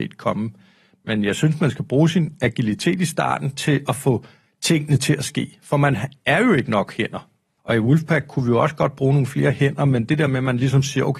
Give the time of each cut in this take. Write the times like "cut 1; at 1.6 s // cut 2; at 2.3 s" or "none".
cut 1; at 7.6 s